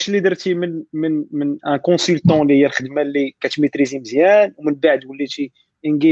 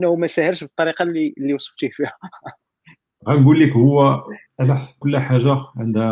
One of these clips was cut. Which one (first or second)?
second